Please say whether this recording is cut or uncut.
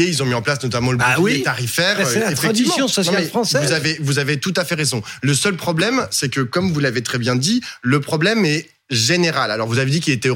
uncut